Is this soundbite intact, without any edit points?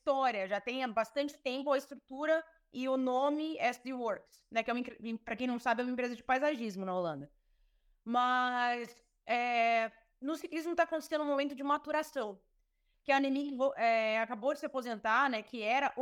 no; 1 cut; at 12.9 s

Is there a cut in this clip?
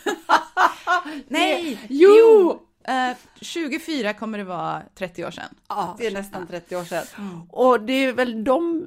yes; 2 cuts; at 6.0 s, 7.1 s

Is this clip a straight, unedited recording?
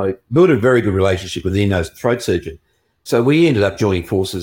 yes; 0 cuts

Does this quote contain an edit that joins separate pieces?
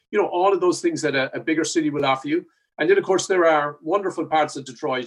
yes; 1 cut; at 2.7 s

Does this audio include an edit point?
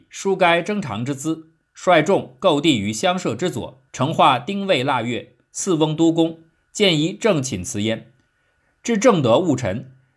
yes; 1 cut; at 3.9 s

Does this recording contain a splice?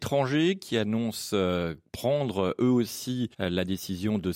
yes; 1 cut; at 3.3 s

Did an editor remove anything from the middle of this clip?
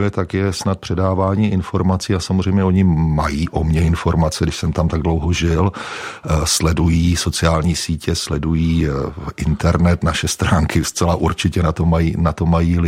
no; 0 cuts

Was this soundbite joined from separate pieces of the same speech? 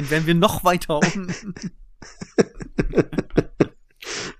no; 0 cuts

